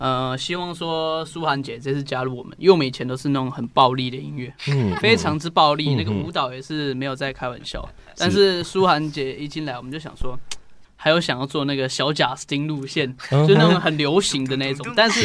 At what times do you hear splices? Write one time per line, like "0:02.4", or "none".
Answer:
0:10.8

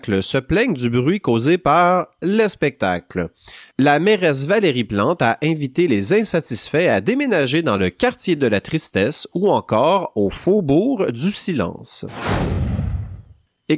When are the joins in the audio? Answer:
none

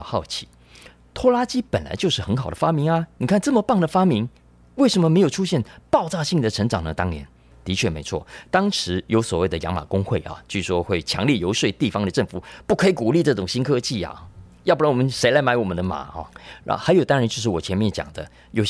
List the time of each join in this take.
none

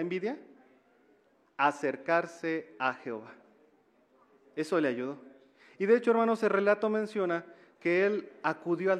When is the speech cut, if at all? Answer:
none

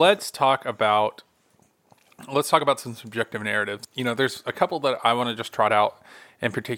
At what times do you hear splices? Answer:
none

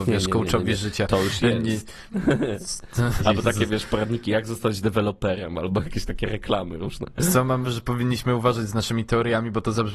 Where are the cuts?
0:03.2
0:07.6

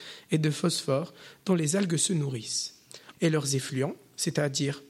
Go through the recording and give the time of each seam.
0:03.1

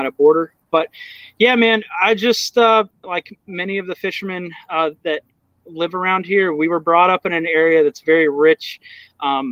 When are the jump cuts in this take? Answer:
0:03.0

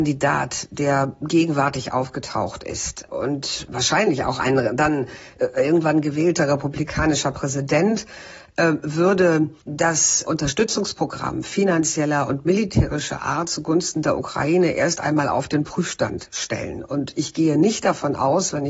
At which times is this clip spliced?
0:09.6

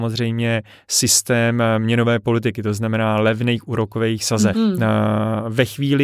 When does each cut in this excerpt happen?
0:04.5

